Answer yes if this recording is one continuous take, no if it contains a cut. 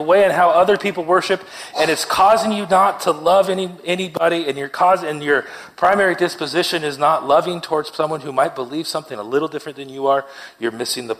yes